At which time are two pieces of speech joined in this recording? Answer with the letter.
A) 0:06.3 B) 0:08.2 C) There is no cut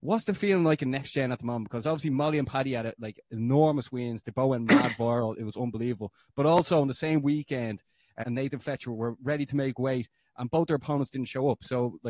B